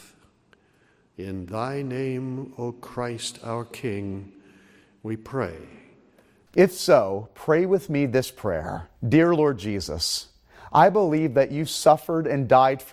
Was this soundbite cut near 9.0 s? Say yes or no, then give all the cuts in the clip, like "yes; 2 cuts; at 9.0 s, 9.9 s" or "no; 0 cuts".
yes; 2 cuts; at 6.5 s, 9.0 s